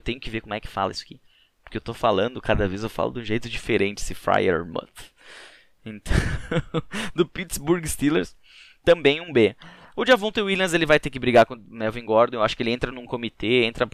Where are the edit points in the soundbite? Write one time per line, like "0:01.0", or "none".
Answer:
none